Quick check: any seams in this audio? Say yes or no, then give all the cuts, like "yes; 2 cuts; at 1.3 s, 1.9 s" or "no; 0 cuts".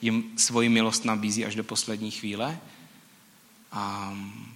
no; 0 cuts